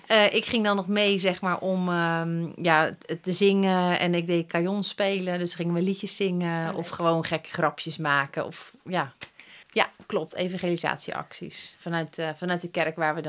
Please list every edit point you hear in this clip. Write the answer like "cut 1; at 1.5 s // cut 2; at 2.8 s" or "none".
cut 1; at 9.6 s